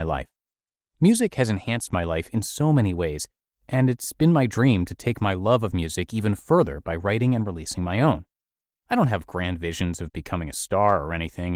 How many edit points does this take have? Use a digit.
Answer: 0